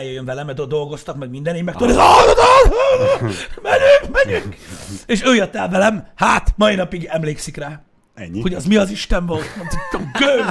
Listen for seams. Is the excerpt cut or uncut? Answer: uncut